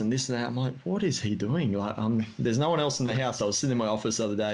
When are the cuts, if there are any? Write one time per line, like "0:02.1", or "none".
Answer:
0:03.4